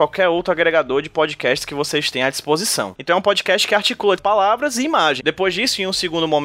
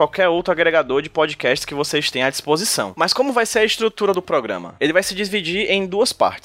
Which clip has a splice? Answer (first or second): first